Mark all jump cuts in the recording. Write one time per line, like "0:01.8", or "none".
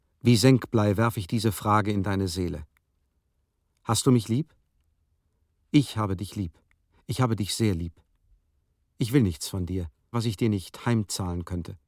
0:10.1

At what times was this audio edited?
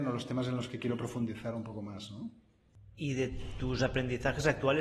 none

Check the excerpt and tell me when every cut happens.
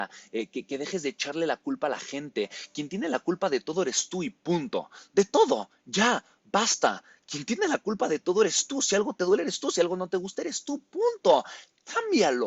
none

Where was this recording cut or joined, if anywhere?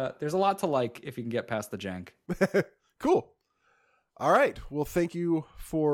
none

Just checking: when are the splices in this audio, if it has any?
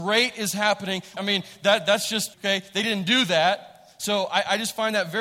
0:01.2
0:02.3

